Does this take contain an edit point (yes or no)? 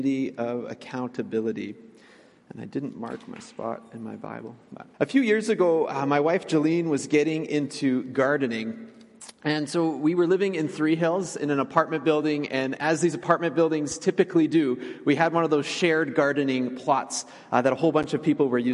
yes